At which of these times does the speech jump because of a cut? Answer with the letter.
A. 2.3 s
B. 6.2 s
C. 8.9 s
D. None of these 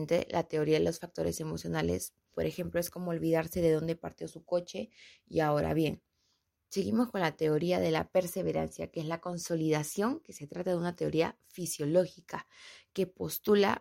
A